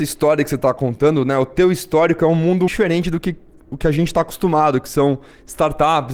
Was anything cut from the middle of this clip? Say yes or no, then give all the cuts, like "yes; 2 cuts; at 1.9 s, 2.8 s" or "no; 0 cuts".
yes; 1 cut; at 2.7 s